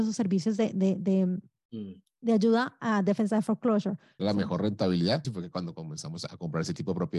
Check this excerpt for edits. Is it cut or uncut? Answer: cut